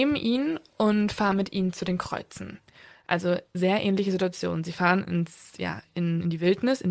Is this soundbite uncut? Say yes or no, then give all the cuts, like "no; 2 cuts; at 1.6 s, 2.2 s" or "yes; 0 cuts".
yes; 0 cuts